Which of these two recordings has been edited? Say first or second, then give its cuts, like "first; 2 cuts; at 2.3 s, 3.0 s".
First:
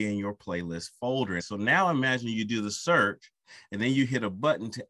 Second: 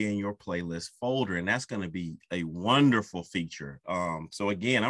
first; 1 cut; at 1.4 s